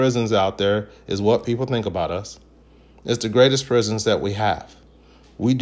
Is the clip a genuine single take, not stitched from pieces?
yes; 0 cuts

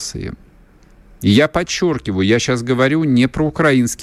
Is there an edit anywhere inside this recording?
no; 0 cuts

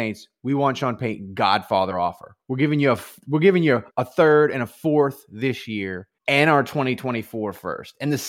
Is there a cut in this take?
yes; 2 cuts; at 3.9 s, 6.2 s

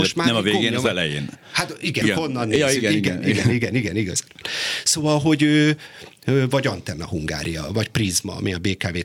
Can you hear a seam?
yes; 1 cut; at 2.0 s

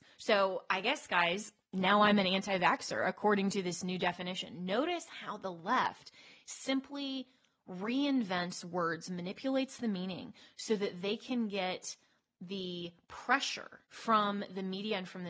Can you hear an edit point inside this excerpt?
yes; 1 cut; at 13.9 s

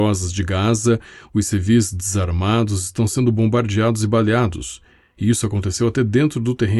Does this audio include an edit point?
no; 0 cuts

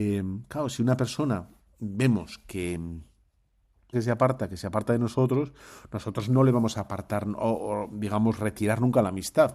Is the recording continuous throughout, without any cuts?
no; 1 cut; at 3.9 s

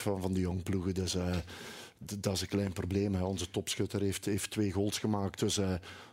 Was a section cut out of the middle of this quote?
no; 0 cuts

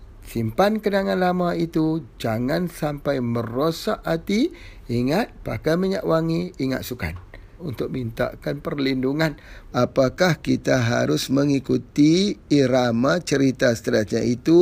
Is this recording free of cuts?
no; 2 cuts; at 7.6 s, 9.7 s

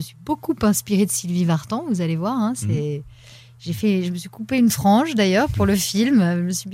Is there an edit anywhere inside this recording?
no; 0 cuts

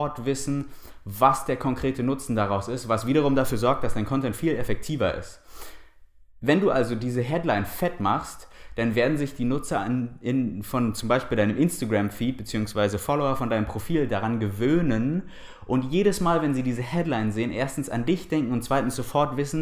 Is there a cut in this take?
no; 0 cuts

